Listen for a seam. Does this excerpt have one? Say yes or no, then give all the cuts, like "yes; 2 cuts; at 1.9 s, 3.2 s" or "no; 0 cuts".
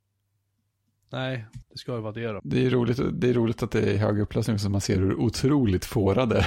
yes; 1 cut; at 1.6 s